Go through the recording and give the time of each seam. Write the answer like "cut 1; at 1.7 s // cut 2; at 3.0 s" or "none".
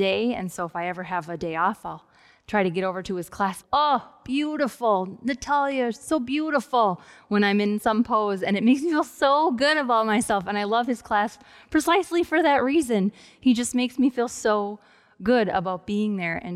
cut 1; at 3.6 s